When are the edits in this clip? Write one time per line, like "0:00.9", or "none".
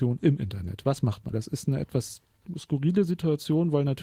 0:01.3